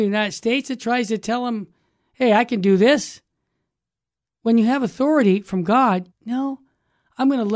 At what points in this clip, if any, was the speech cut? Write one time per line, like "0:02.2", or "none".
0:06.1